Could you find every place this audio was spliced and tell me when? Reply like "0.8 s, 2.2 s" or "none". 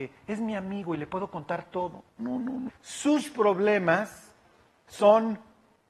2.7 s